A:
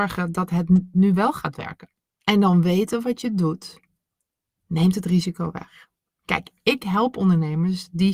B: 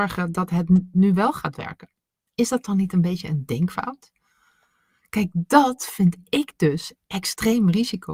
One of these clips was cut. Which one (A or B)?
A